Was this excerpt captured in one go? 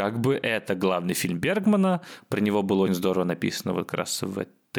no; 1 cut; at 2.9 s

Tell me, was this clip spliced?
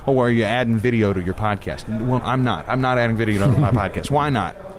yes; 1 cut; at 2.2 s

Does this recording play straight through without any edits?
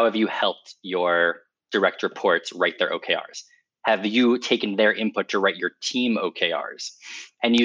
yes; 0 cuts

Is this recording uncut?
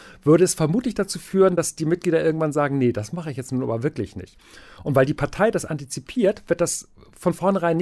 yes; 0 cuts

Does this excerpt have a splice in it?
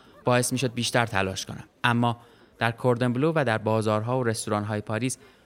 yes; 1 cut; at 1.7 s

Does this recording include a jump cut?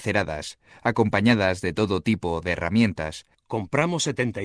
yes; 1 cut; at 3.3 s

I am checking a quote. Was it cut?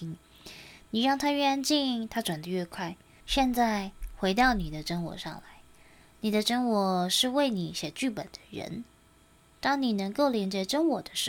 yes; 1 cut; at 3.2 s

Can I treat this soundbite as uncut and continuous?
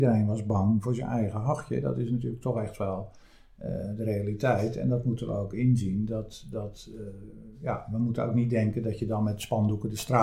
yes; 0 cuts

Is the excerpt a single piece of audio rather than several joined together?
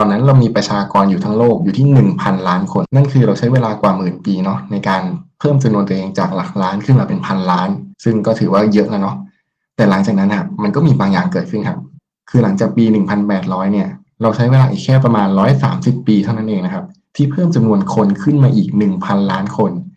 no; 2 cuts; at 2.8 s, 7.9 s

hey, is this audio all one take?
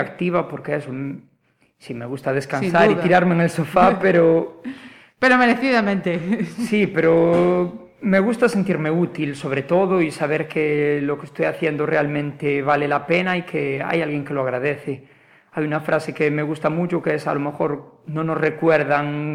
yes; 0 cuts

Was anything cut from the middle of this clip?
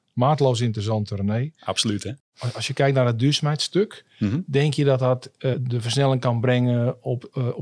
yes; 1 cut; at 5.5 s

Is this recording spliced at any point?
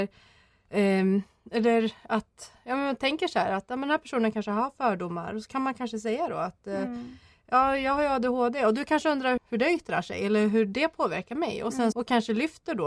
yes; 2 cuts; at 9.4 s, 11.9 s

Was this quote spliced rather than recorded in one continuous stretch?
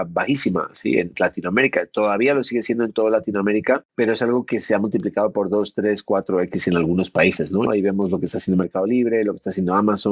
yes; 1 cut; at 7.7 s

